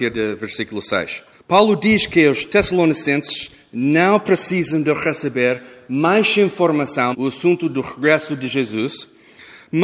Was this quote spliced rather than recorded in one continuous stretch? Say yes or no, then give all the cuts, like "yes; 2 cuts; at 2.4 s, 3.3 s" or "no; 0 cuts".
yes; 2 cuts; at 1.3 s, 7.1 s